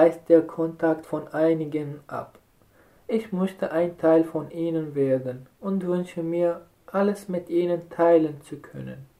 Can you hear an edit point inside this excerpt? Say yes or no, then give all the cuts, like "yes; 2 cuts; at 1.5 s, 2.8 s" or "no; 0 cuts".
yes; 1 cut; at 3.0 s